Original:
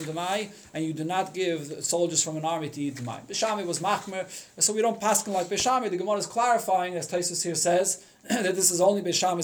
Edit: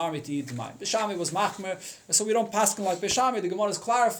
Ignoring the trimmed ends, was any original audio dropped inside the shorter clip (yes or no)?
no